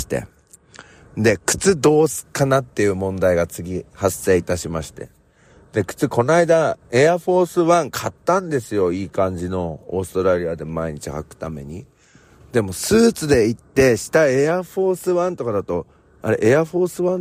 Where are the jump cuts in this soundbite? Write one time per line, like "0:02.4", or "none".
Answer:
none